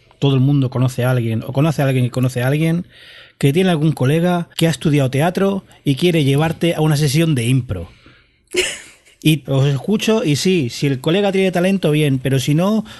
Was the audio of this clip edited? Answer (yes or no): yes